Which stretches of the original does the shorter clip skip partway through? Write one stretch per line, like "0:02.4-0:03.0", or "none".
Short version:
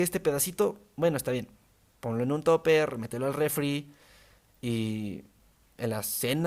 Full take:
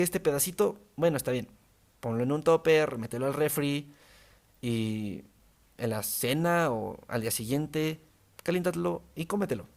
none